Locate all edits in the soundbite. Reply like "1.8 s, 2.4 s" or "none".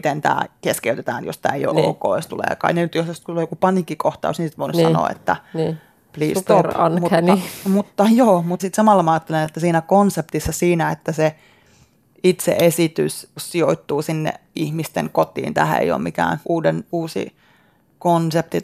none